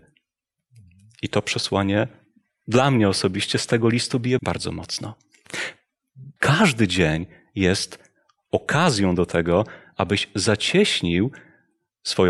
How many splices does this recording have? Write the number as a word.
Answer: two